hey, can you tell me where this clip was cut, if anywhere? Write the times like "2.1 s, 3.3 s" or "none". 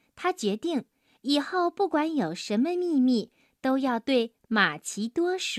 none